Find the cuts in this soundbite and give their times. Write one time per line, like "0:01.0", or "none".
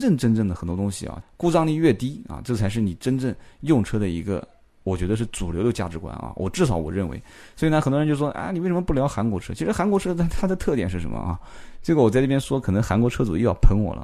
0:01.2